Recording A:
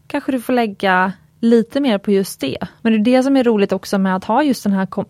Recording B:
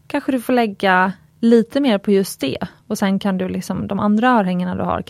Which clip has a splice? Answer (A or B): A